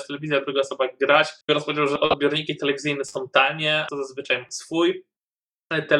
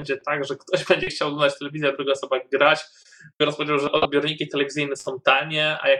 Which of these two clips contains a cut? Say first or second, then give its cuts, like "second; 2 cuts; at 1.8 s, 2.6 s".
first; 2 cuts; at 1.4 s, 3.9 s